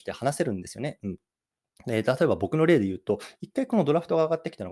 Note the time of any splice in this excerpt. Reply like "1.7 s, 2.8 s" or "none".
none